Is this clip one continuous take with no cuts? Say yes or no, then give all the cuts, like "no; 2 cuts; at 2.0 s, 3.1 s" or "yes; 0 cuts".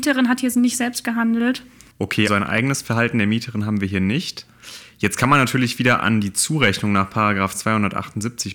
no; 1 cut; at 2.3 s